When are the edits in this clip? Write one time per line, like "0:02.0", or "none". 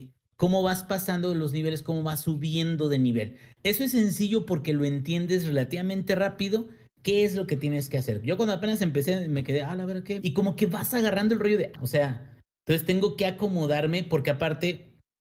0:10.2
0:11.7